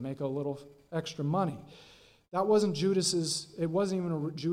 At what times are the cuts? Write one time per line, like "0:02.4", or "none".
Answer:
none